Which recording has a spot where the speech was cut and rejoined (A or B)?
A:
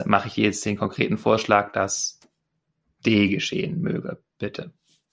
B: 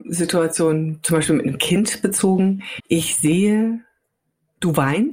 B